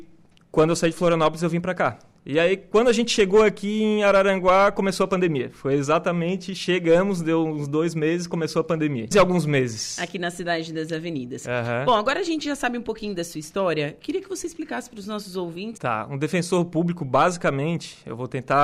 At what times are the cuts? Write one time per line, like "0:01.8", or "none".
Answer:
0:09.1
0:15.8